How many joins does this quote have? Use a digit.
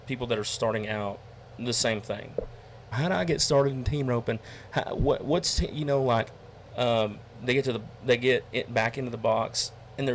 2